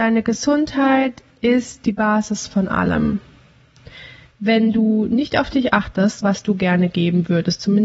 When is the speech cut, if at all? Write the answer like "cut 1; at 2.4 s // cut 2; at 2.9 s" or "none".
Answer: cut 1; at 6.2 s